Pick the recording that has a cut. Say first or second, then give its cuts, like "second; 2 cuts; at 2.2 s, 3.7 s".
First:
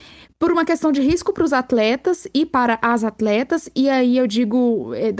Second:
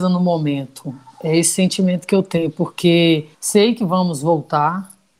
second; 1 cut; at 3.3 s